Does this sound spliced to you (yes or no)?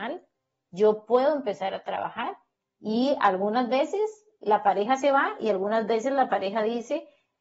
no